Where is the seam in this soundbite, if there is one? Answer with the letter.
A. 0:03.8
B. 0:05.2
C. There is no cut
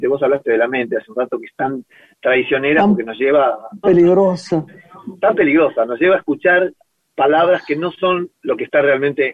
A